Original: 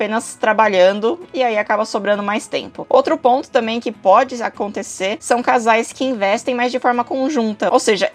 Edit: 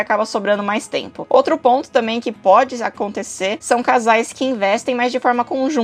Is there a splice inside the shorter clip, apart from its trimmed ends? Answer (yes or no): no